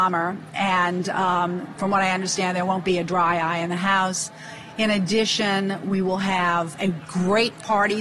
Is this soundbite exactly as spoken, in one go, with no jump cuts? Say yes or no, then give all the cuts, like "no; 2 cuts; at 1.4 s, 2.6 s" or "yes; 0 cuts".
no; 1 cut; at 6.7 s